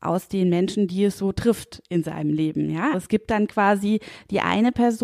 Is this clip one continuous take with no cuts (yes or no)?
no